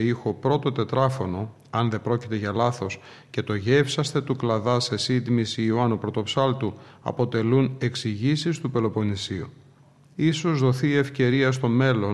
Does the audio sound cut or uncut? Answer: uncut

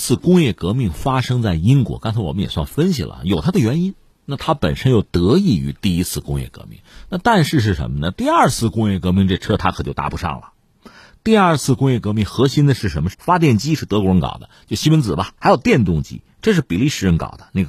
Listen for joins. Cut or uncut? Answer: cut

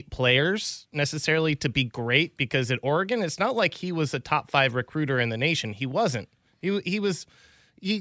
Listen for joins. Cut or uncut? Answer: uncut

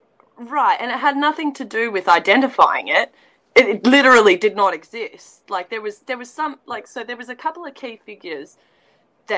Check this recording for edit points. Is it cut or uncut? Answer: uncut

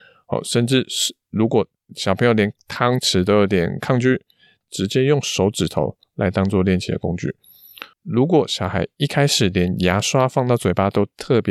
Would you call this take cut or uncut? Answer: cut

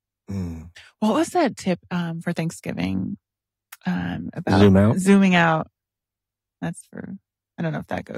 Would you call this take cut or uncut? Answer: uncut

